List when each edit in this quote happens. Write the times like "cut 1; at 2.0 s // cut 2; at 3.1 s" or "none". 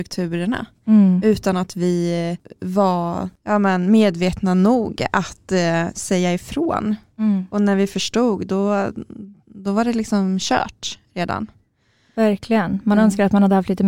none

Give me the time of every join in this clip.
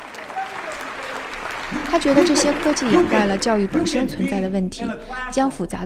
none

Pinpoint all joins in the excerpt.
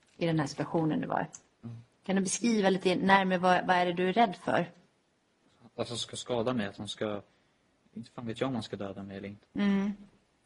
cut 1; at 9.4 s

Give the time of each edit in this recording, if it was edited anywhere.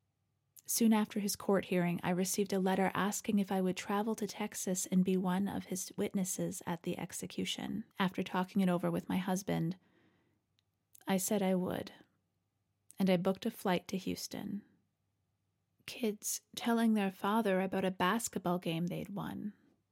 cut 1; at 7.9 s // cut 2; at 15.7 s

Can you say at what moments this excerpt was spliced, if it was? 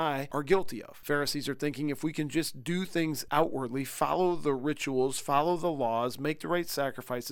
none

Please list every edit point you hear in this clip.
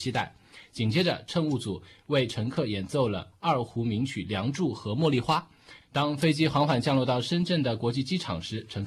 cut 1; at 5.8 s

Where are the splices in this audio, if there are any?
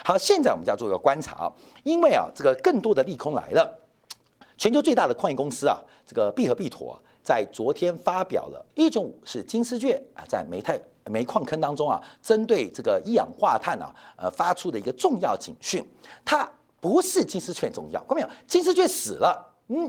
cut 1; at 8.7 s

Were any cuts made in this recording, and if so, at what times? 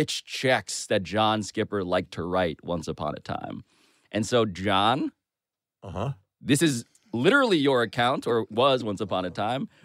none

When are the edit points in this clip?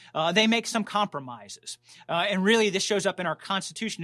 none

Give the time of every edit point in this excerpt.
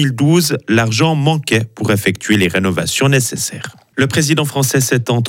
cut 1; at 3.9 s

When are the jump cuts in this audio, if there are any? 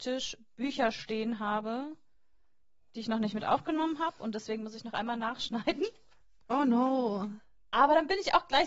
none

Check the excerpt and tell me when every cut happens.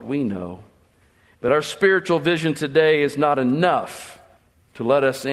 cut 1; at 1.3 s

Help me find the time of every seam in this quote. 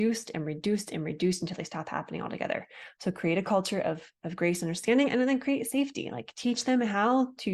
none

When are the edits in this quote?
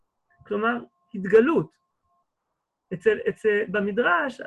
none

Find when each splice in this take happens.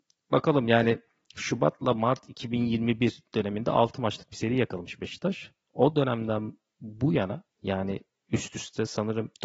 none

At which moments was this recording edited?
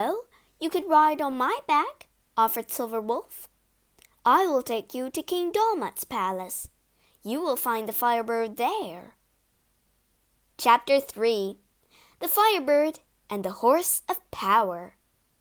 none

